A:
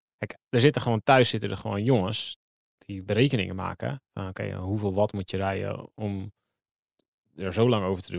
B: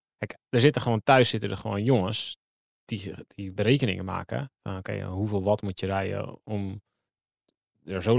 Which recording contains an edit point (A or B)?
A